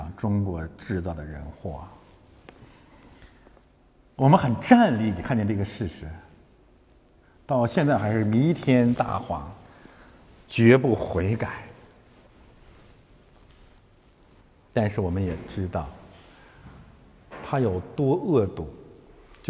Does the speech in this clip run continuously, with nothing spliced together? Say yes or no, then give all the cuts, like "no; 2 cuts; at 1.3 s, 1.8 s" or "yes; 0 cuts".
yes; 0 cuts